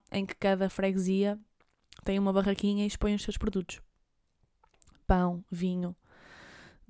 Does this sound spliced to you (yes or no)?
no